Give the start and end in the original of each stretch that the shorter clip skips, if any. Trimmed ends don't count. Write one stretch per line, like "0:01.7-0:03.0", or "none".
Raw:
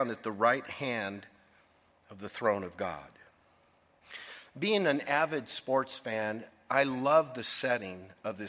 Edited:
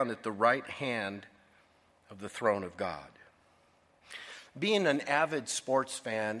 none